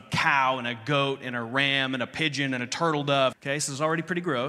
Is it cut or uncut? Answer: cut